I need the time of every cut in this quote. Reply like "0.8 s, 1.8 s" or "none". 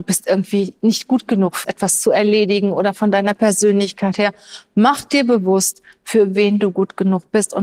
1.6 s